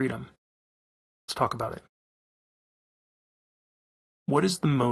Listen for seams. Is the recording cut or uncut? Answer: uncut